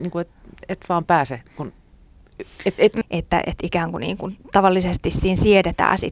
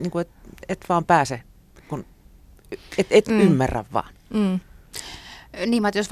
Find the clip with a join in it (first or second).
first